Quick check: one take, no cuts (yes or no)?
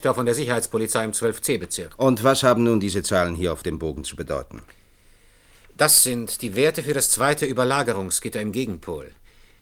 yes